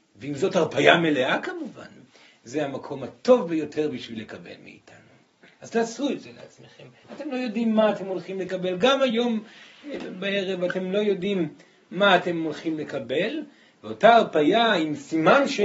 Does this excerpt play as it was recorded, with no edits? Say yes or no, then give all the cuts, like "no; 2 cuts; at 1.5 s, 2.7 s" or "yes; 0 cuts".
no; 1 cut; at 7.0 s